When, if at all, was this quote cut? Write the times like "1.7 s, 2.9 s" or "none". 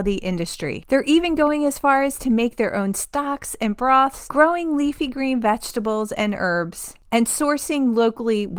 none